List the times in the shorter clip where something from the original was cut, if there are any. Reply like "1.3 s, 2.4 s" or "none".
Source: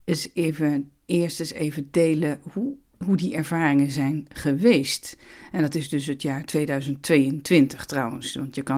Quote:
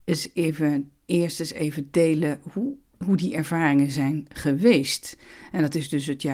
none